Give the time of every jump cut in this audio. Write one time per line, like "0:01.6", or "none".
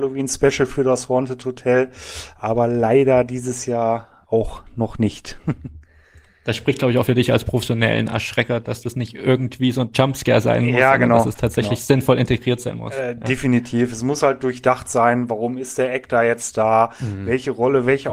none

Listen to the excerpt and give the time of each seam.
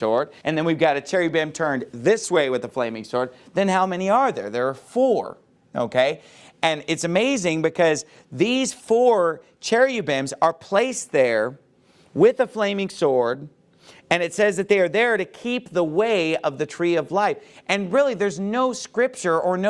none

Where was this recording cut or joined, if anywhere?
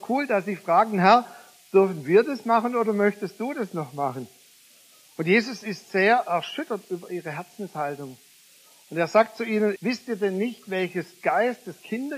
0:09.8

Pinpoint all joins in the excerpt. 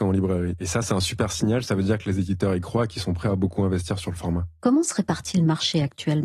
none

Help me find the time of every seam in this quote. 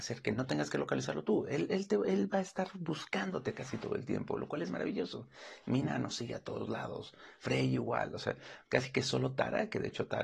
none

